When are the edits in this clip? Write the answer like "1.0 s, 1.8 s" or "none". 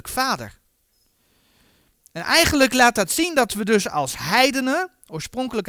none